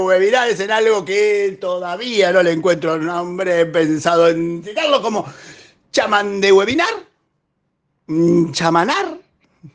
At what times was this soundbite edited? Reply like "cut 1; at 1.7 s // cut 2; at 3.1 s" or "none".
none